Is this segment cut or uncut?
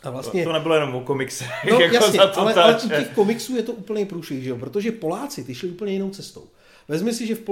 uncut